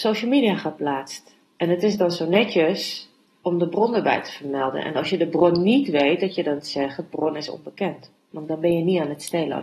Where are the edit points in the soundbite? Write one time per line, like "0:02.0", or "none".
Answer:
none